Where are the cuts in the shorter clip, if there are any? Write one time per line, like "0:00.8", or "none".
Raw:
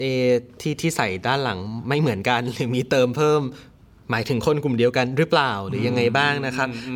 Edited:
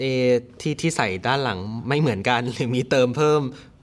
none